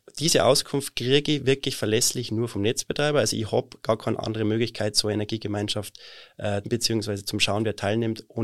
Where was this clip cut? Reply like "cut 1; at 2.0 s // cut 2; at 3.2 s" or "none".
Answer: cut 1; at 6.6 s

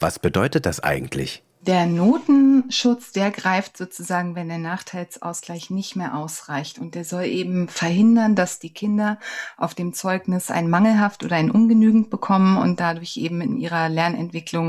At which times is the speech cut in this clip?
none

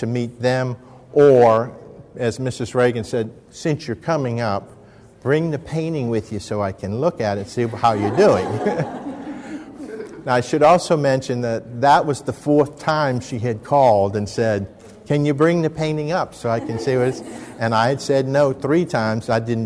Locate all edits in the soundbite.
none

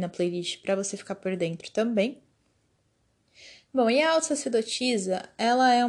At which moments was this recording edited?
none

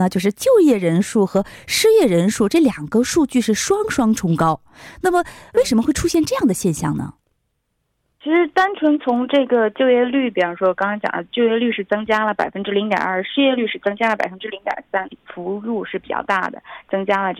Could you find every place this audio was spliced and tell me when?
cut 1; at 15.0 s

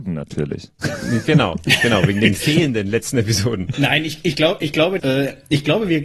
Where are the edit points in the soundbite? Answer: cut 1; at 3.7 s // cut 2; at 5.0 s

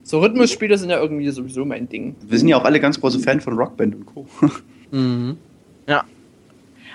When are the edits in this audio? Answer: cut 1; at 2.2 s

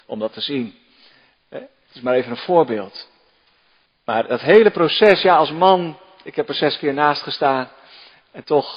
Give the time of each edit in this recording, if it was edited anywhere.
cut 1; at 3.9 s

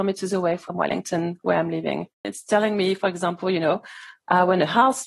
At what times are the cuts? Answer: cut 1; at 2.2 s

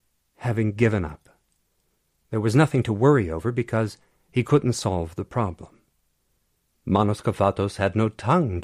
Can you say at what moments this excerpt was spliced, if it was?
cut 1; at 6.7 s

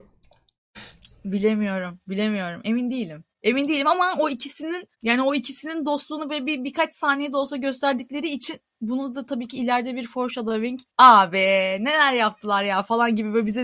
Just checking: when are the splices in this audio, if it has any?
cut 1; at 3.3 s // cut 2; at 4.9 s // cut 3; at 10.9 s

